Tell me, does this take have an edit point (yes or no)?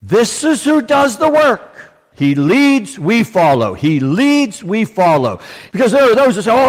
yes